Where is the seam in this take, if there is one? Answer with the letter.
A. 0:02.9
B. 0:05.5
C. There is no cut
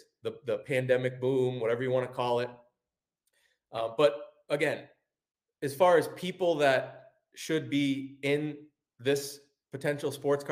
C